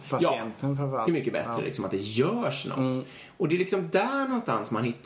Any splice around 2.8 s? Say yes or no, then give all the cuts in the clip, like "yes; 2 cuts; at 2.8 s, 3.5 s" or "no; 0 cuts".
no; 1 cut; at 1.1 s